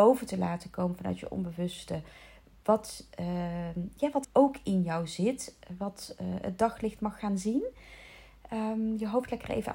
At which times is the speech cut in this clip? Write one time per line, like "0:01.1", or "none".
0:04.2